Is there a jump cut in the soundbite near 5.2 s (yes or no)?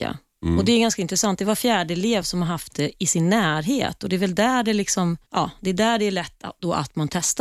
yes